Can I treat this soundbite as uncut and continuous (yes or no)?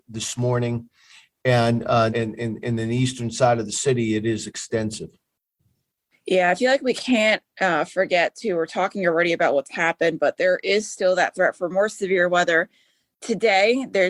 no